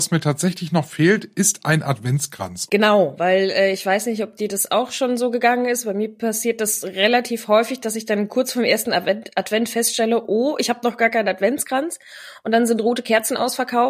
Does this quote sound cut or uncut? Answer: cut